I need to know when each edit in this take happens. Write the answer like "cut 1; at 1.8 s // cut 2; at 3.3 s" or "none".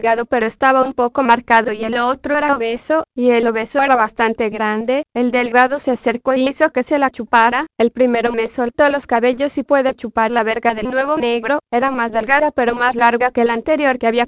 none